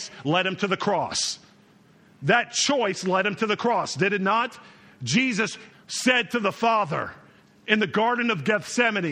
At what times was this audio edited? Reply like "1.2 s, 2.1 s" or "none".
5.7 s